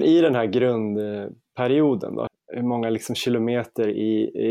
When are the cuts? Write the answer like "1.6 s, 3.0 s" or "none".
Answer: 2.3 s